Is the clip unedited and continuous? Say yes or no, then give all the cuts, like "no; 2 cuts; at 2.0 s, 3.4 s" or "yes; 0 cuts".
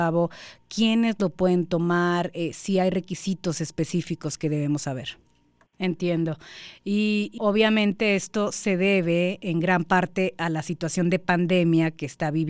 no; 2 cuts; at 5.7 s, 7.4 s